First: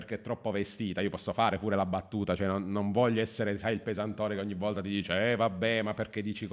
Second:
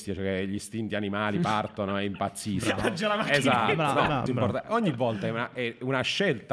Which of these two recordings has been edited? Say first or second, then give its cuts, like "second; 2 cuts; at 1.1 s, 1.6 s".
second; 1 cut; at 4.3 s